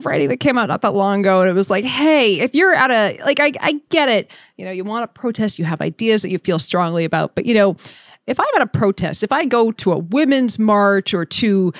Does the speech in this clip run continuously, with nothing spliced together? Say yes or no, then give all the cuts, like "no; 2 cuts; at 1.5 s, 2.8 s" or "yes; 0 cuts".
yes; 0 cuts